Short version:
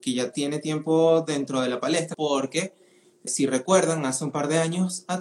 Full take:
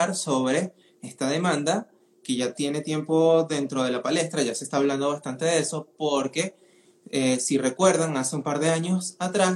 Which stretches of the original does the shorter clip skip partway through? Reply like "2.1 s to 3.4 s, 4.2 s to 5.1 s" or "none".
4.4 s to 6.0 s, 7.1 s to 7.4 s